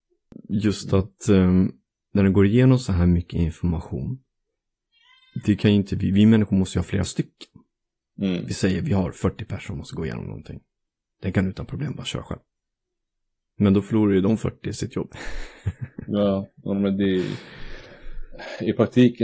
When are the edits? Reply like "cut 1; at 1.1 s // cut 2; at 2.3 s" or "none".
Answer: none